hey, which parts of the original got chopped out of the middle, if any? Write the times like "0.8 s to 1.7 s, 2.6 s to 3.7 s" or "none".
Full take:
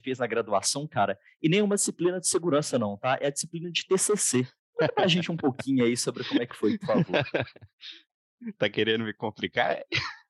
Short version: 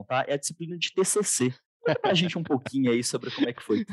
none